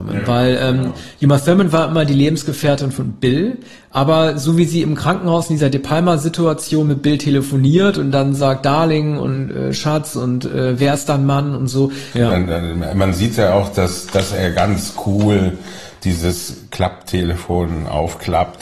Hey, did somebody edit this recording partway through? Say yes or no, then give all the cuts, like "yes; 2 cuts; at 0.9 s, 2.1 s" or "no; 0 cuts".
yes; 1 cut; at 12.1 s